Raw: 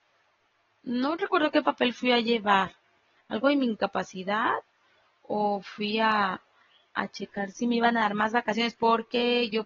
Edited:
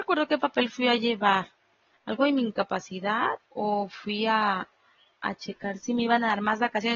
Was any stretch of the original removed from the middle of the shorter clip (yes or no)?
yes